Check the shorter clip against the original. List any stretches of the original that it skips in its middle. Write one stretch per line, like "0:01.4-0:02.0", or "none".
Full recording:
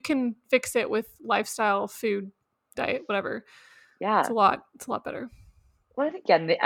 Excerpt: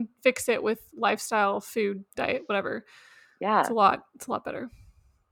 0:02.3-0:02.7